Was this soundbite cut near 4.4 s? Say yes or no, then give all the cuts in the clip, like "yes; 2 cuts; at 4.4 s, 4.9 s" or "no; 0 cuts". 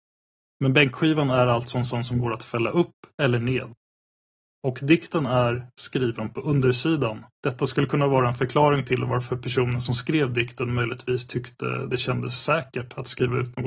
no; 2 cuts; at 5.7 s, 7.3 s